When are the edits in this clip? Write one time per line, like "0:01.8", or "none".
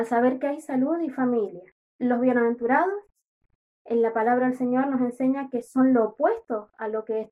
none